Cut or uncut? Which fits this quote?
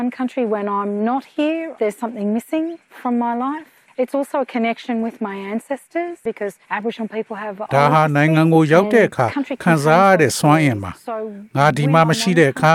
uncut